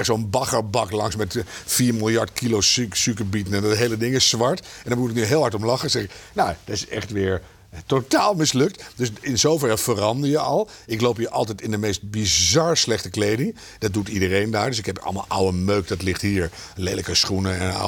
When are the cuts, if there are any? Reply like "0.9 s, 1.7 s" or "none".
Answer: none